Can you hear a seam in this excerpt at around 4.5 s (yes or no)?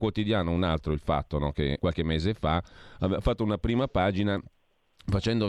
no